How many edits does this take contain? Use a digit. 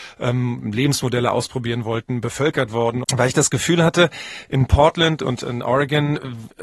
1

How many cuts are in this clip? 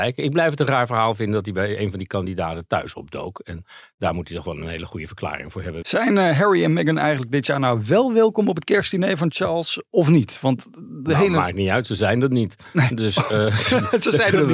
1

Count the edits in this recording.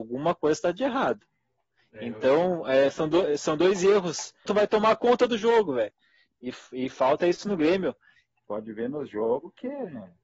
2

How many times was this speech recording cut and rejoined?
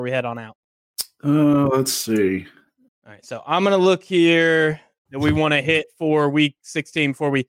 2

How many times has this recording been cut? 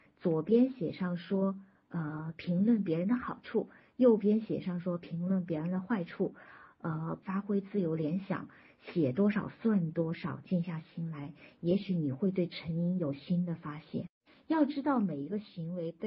1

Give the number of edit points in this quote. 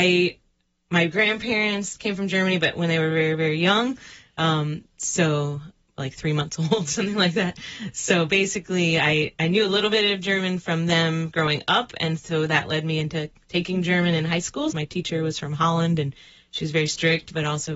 1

